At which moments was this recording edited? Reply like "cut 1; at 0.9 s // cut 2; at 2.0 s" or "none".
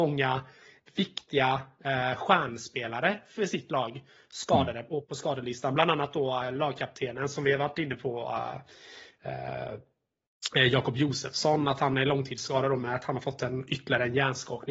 none